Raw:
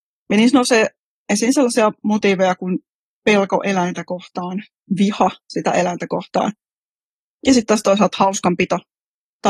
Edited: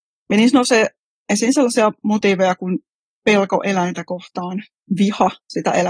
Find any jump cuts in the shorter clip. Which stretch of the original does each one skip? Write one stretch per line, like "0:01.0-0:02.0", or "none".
none